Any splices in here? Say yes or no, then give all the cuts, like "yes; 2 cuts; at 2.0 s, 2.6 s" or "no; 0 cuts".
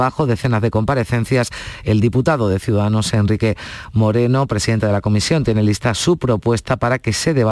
no; 0 cuts